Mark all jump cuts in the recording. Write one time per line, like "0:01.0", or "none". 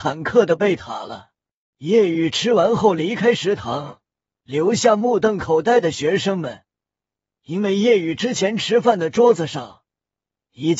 0:01.7